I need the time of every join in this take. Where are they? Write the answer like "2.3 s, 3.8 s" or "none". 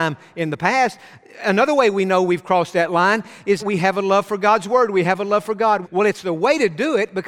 3.6 s, 5.8 s